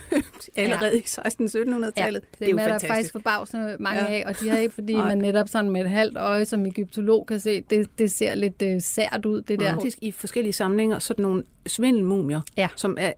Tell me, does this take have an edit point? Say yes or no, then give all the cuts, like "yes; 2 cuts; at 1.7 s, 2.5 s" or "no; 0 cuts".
yes; 2 cuts; at 4.7 s, 9.8 s